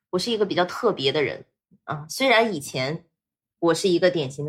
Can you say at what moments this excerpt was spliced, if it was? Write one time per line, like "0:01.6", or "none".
none